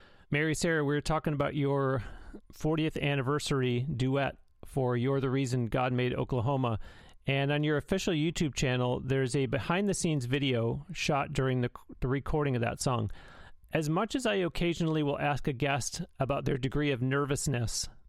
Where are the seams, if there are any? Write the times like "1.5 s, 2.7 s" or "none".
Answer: none